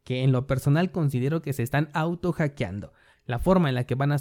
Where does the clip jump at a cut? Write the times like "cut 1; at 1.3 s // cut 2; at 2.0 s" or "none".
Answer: cut 1; at 3.1 s